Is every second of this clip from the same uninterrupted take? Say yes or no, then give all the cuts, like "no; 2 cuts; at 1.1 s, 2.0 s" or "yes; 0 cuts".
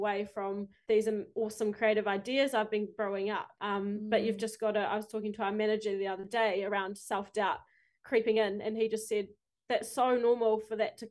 yes; 0 cuts